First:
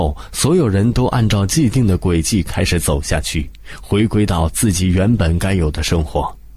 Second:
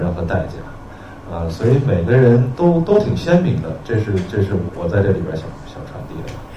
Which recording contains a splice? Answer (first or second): second